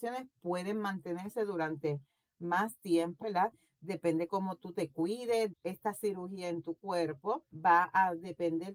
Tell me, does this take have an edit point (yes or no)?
yes